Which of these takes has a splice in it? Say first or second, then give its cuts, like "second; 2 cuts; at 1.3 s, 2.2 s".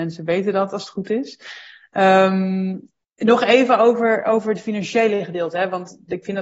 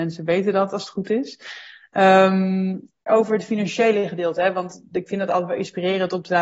second; 1 cut; at 3.1 s